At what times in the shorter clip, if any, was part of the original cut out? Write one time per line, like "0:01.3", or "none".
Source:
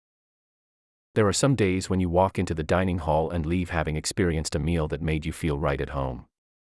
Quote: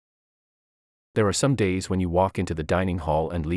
none